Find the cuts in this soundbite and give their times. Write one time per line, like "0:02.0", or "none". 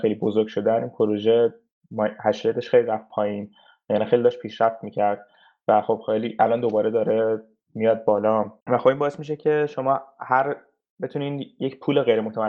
0:08.6